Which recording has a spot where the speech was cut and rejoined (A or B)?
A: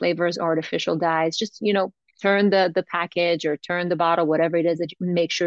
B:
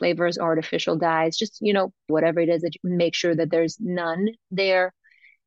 B